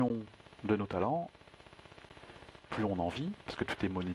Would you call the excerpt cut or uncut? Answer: cut